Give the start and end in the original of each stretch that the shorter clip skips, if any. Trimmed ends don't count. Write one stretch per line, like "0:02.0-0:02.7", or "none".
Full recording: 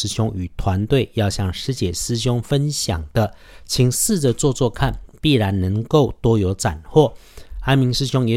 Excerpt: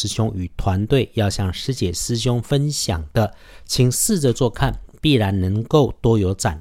0:04.3-0:04.5